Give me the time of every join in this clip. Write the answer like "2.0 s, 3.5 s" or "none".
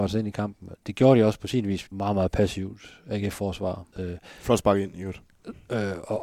1.9 s, 3.9 s